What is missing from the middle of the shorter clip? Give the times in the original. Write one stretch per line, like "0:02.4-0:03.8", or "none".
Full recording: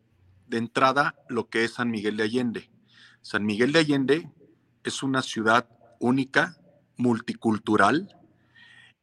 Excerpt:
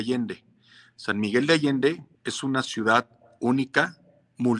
0:04.4-0:04.7